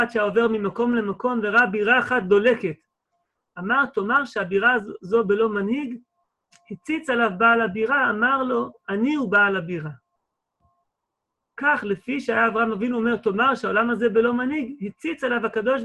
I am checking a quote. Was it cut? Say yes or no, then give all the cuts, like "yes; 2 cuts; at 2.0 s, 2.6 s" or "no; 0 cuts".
no; 0 cuts